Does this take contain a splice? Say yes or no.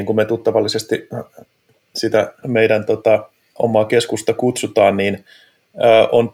yes